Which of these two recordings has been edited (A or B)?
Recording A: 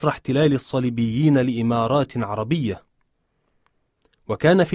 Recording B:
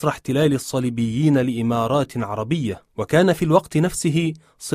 B